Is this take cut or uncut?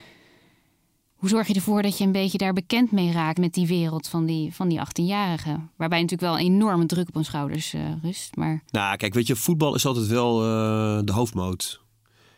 cut